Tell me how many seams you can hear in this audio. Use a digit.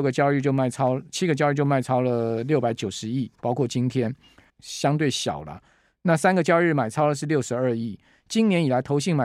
1